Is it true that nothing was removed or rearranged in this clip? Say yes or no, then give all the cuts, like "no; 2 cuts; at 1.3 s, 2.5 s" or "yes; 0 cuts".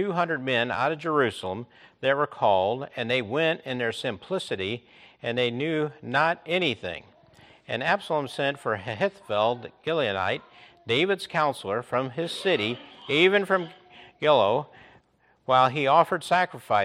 yes; 0 cuts